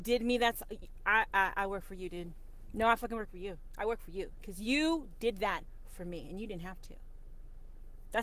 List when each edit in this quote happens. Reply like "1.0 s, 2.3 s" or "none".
1.3 s